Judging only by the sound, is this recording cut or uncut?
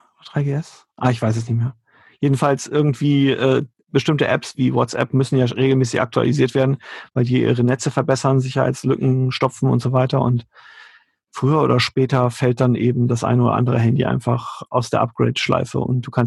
uncut